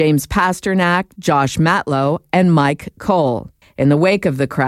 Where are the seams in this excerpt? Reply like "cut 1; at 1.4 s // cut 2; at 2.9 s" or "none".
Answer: cut 1; at 3.6 s

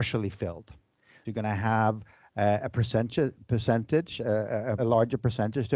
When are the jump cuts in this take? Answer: cut 1; at 1.2 s // cut 2; at 4.8 s

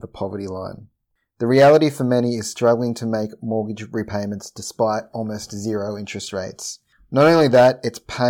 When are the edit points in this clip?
none

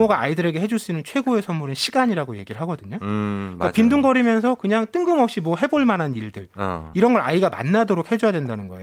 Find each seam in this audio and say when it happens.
none

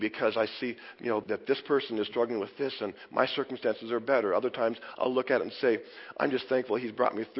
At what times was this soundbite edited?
cut 1; at 1.2 s

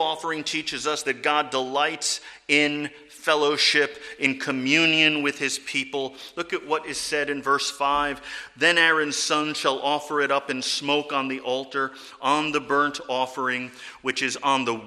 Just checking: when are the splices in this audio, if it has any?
none

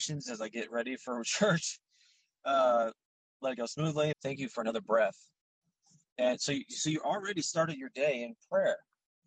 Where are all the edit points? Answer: cut 1; at 4.1 s

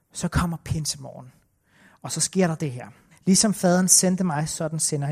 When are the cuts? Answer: cut 1; at 3.1 s

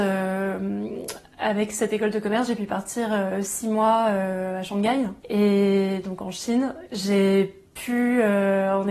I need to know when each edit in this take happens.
cut 1; at 5.2 s // cut 2; at 6.9 s

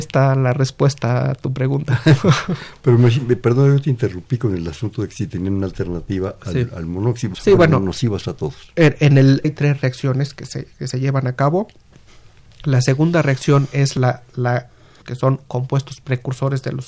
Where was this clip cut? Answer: cut 1; at 7.3 s // cut 2; at 9.4 s // cut 3; at 15.0 s

